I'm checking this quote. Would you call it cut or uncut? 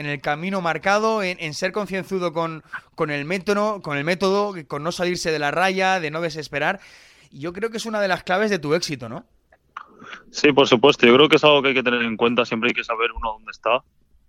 uncut